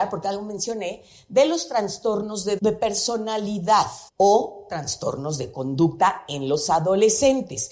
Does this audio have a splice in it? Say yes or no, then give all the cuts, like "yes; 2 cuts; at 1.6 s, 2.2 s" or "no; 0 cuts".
yes; 2 cuts; at 2.6 s, 4.1 s